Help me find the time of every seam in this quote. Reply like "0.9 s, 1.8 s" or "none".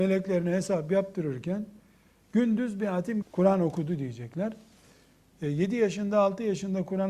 3.2 s